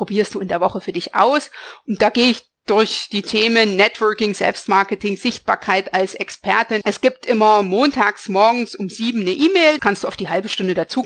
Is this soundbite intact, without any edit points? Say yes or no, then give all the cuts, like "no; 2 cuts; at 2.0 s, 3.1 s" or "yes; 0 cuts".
no; 2 cuts; at 6.8 s, 9.8 s